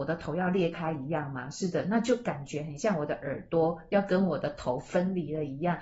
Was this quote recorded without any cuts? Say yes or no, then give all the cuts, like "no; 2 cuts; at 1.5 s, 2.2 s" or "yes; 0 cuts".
yes; 0 cuts